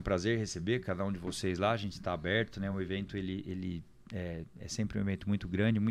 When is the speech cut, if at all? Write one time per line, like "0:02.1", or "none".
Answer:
none